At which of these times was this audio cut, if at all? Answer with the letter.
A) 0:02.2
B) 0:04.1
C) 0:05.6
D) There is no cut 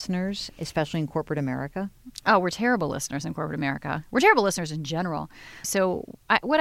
C